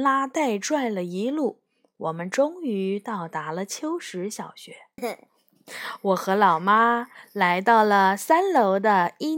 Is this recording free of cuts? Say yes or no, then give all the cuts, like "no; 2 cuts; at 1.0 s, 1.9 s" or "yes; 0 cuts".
no; 1 cut; at 5.0 s